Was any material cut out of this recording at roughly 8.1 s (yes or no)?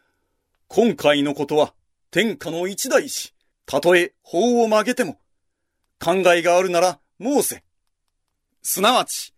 no